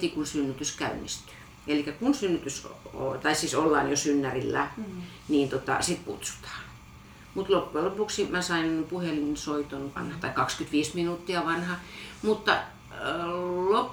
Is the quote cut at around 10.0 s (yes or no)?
yes